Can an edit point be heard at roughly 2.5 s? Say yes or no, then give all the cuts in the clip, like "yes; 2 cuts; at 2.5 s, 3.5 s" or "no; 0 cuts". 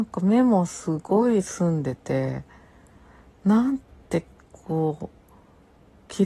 no; 0 cuts